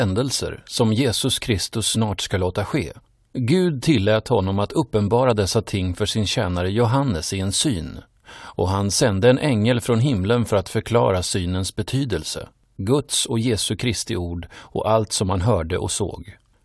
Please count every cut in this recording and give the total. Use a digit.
1